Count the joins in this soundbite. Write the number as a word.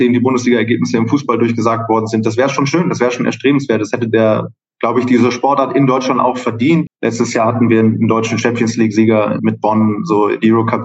two